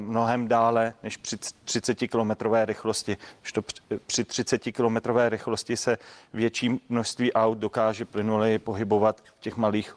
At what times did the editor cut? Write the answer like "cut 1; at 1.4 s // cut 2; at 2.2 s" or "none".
none